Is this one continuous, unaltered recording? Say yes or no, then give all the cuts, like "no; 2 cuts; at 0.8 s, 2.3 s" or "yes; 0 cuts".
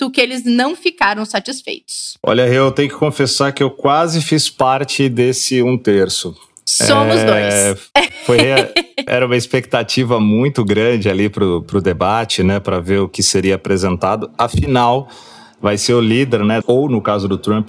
no; 2 cuts; at 9.1 s, 16.6 s